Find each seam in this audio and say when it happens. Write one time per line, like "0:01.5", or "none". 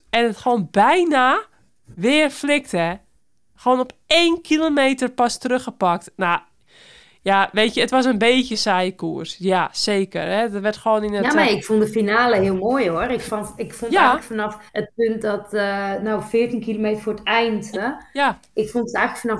0:14.7
0:17.7